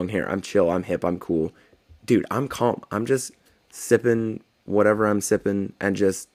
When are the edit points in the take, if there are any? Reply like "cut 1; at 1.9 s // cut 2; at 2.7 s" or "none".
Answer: none

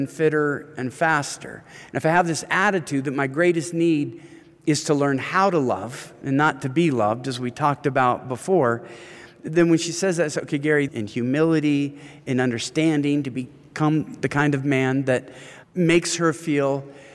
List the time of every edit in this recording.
cut 1; at 10.9 s // cut 2; at 15.6 s

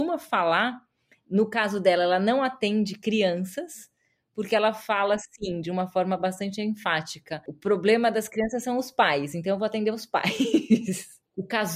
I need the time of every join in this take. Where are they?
none

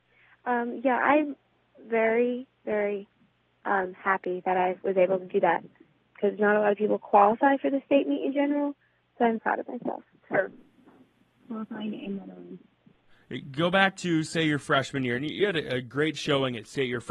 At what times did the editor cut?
cut 1; at 9.4 s

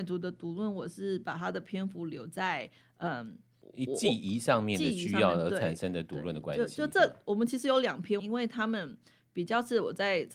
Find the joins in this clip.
cut 1; at 8.2 s

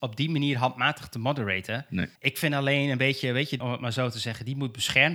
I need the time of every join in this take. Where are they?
cut 1; at 2.2 s // cut 2; at 3.6 s

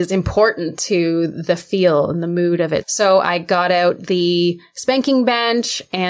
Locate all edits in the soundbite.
cut 1; at 2.8 s

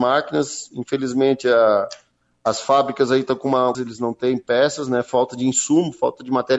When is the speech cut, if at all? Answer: cut 1; at 3.7 s

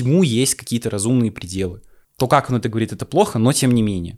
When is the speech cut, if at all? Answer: cut 1; at 2.0 s

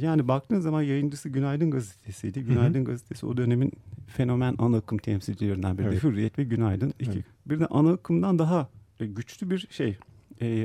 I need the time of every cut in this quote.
cut 1; at 7.2 s

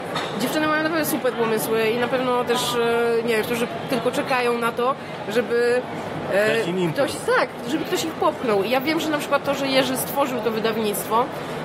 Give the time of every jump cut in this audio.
cut 1; at 3.4 s

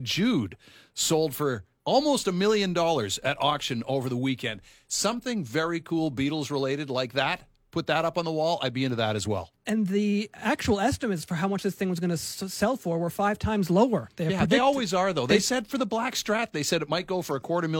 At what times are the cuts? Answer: none

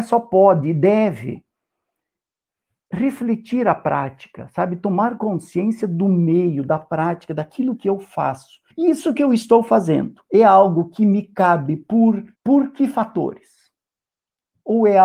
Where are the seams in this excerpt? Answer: cut 1; at 8.7 s // cut 2; at 12.3 s

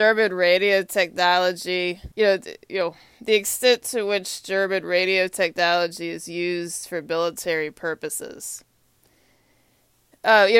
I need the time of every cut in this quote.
cut 1; at 2.1 s

